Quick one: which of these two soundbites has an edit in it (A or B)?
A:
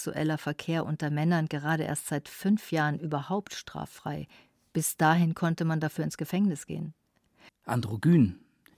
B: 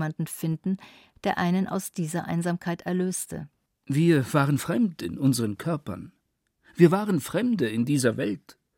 A